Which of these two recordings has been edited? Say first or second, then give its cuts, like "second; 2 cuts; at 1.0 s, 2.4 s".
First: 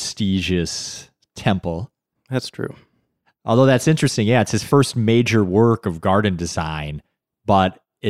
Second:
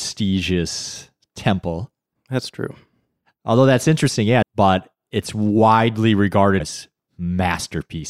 second; 2 cuts; at 4.4 s, 6.6 s